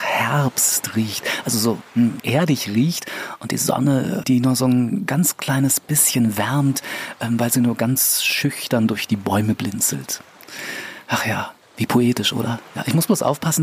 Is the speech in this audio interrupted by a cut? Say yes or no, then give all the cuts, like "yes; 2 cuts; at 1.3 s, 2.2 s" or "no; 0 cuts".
yes; 2 cuts; at 2.2 s, 4.2 s